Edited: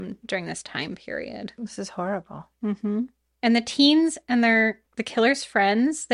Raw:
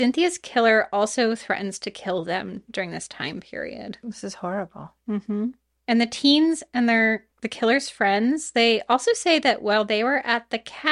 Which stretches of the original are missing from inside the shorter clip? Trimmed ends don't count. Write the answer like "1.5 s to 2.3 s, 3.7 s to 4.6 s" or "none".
none

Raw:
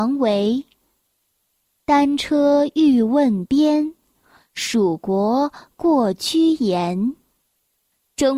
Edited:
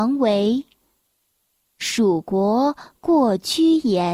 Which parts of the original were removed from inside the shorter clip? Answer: 1.7 s to 4.5 s

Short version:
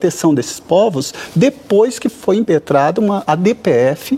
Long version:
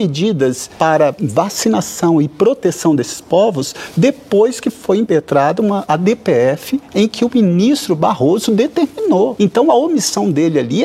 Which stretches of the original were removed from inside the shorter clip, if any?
none

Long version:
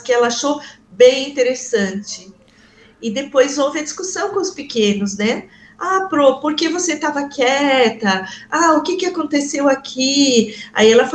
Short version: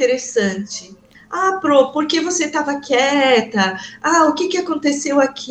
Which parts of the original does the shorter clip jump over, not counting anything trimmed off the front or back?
2.5 s to 5.6 s

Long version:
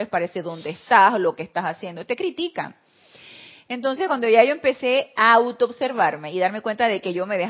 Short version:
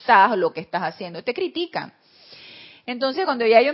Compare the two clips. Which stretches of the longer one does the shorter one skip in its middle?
none

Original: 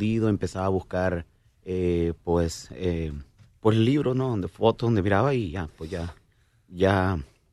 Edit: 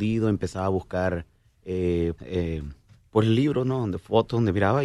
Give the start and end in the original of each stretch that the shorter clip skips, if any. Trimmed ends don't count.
2.2 s to 2.7 s

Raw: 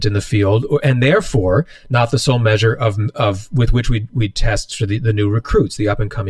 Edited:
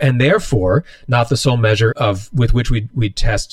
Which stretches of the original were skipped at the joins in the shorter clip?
2.7 s to 3.1 s

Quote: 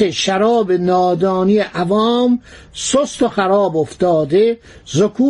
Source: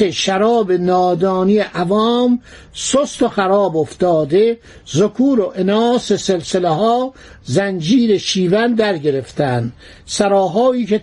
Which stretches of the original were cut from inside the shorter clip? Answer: none

